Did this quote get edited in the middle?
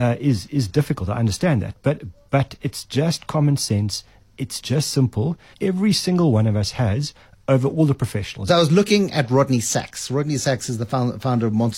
yes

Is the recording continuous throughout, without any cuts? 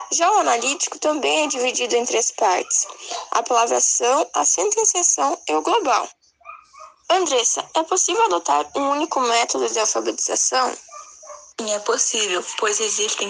yes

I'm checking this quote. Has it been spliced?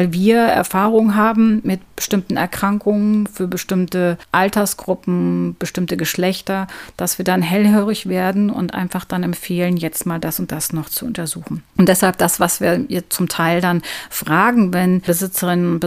no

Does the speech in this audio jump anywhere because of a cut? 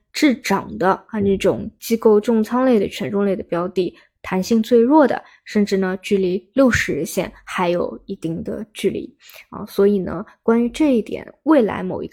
no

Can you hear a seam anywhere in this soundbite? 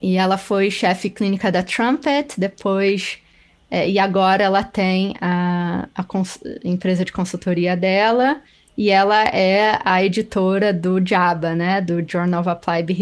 no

